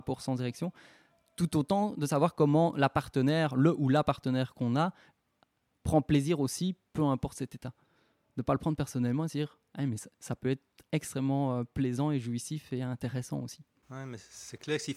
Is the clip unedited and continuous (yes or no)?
yes